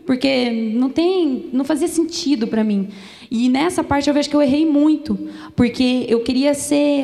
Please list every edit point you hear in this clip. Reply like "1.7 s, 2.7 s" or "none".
none